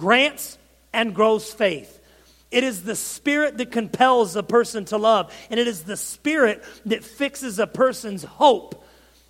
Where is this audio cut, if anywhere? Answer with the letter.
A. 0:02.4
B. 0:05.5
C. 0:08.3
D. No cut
D